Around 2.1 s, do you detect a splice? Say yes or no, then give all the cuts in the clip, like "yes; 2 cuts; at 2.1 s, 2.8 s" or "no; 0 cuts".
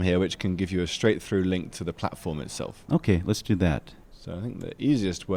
no; 1 cut; at 4.0 s